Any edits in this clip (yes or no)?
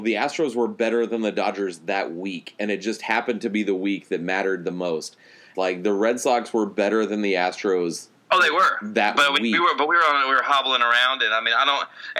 yes